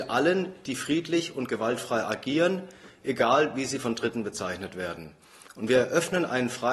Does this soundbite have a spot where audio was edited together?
no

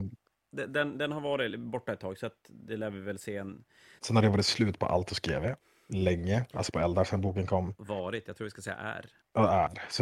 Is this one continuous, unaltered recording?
no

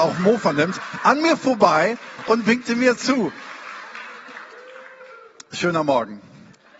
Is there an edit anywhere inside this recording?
yes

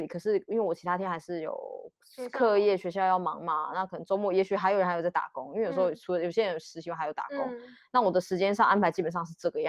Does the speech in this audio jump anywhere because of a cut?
no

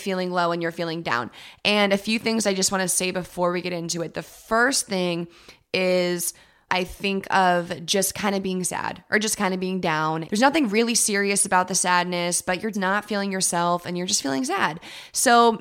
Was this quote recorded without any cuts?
no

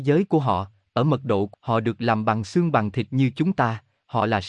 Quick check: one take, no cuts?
no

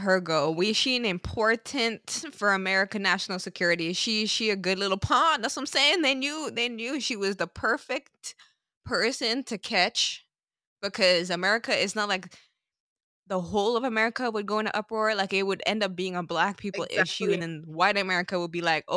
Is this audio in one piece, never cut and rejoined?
yes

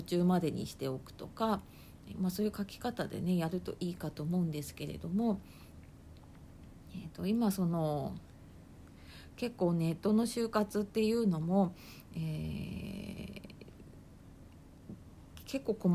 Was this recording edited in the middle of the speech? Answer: no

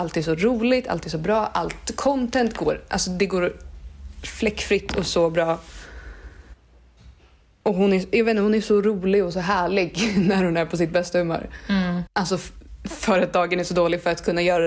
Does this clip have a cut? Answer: yes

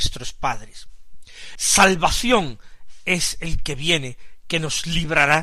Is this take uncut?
no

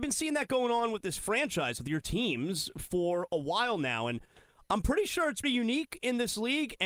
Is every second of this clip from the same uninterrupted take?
no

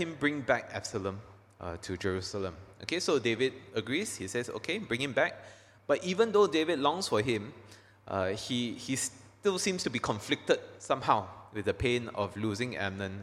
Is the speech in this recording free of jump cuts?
yes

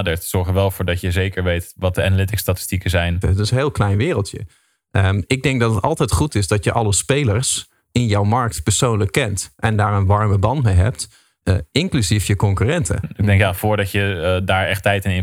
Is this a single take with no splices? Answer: no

